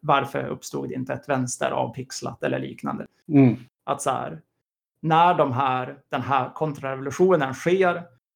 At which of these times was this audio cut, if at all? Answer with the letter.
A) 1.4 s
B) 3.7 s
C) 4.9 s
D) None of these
B